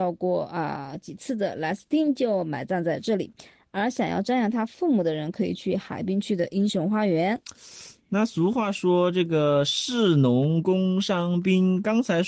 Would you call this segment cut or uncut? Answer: uncut